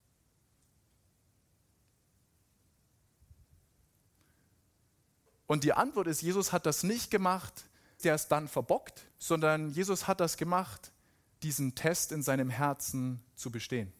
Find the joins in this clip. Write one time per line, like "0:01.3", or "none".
0:08.0
0:09.1
0:11.3